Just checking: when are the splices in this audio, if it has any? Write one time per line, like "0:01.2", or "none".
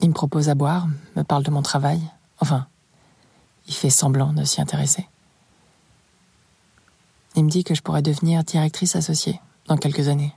none